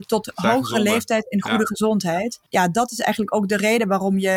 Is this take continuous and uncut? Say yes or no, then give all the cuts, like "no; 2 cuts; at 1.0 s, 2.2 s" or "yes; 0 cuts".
yes; 0 cuts